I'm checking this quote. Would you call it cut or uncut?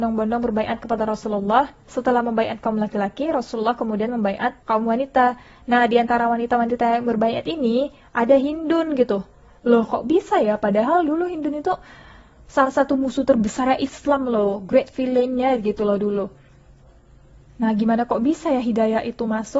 cut